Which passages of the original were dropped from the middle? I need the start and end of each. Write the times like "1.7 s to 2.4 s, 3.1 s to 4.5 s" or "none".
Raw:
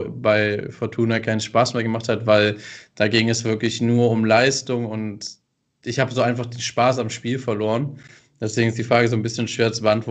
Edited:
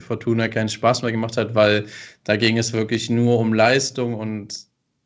none